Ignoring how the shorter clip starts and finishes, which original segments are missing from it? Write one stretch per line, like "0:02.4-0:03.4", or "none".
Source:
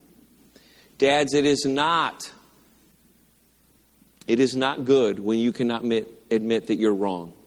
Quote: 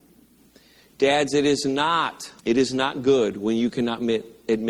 0:02.4-0:04.2